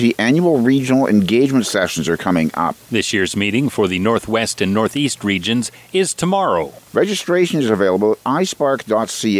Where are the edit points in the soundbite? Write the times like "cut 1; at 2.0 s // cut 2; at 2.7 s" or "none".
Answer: cut 1; at 6.9 s